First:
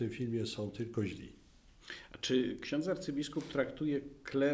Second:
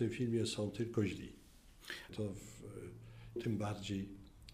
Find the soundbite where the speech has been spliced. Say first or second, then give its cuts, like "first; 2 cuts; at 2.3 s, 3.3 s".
second; 2 cuts; at 2.1 s, 3.4 s